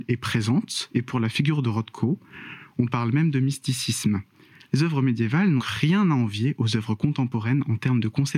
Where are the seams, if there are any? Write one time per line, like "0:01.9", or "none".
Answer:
0:05.6